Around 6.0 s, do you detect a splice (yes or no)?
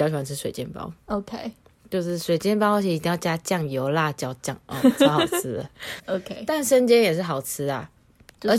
yes